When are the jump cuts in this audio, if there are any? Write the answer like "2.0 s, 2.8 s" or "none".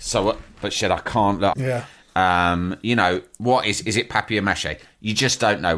1.5 s